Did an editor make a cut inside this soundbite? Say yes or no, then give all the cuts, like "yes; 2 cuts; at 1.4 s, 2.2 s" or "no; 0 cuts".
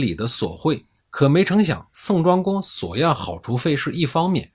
yes; 1 cut; at 1.0 s